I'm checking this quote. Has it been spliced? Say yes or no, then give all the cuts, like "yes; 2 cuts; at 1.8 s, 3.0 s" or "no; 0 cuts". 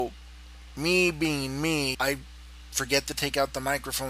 yes; 1 cut; at 1.9 s